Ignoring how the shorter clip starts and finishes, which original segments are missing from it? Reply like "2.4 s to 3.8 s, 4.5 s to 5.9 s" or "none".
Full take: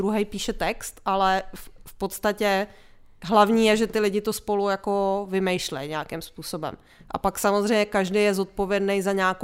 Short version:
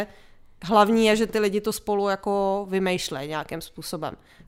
none